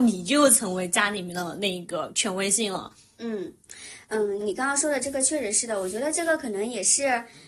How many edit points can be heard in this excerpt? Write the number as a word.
one